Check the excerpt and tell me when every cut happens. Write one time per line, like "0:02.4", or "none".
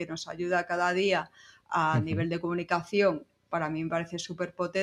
none